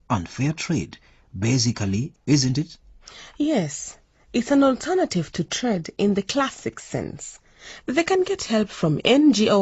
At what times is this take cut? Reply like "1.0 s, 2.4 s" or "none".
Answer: 2.1 s, 7.8 s